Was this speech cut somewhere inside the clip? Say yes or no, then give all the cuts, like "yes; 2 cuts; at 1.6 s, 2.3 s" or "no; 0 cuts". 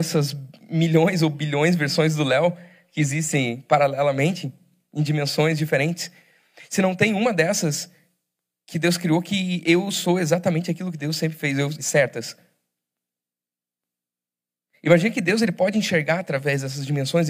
yes; 1 cut; at 11.8 s